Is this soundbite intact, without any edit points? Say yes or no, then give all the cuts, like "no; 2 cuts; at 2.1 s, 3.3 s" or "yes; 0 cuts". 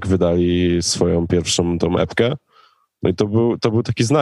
yes; 0 cuts